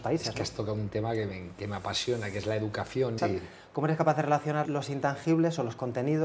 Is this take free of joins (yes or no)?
no